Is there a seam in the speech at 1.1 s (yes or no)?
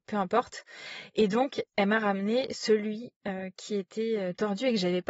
no